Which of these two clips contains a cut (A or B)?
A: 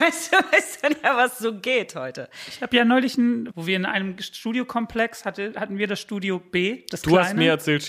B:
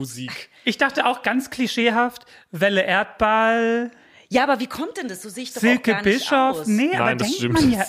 A